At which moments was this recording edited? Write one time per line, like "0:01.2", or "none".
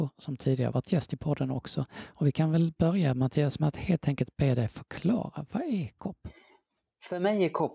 none